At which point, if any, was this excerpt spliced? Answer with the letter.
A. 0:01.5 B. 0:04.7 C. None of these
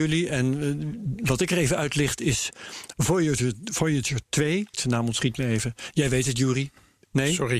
B